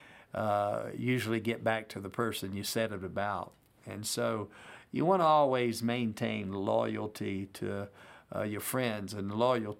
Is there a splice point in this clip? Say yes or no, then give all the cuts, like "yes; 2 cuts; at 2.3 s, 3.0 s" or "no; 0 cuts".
no; 0 cuts